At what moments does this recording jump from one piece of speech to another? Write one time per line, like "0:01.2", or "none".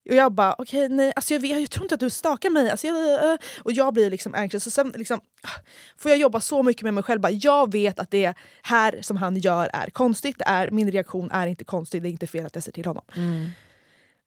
none